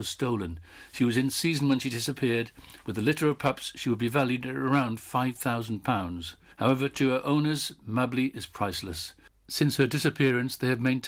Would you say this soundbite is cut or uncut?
uncut